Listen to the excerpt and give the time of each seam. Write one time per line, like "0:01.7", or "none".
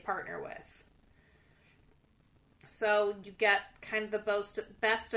none